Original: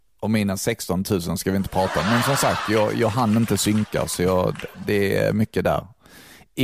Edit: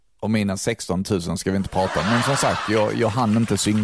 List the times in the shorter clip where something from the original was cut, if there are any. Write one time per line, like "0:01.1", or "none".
none